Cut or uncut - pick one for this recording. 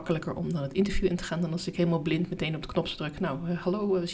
uncut